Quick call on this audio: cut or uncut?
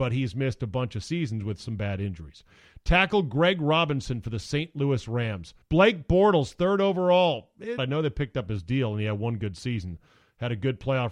cut